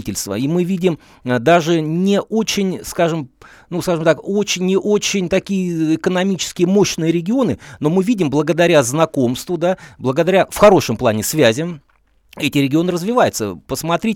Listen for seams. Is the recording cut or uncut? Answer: uncut